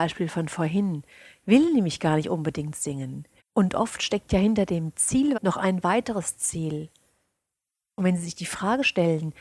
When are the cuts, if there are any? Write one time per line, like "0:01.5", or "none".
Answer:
0:03.4
0:05.3